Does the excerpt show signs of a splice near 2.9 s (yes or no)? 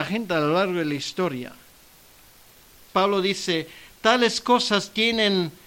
yes